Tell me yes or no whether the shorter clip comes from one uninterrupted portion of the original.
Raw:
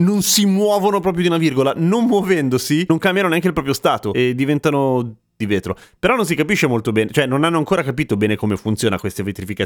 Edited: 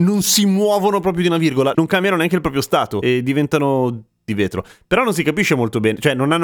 no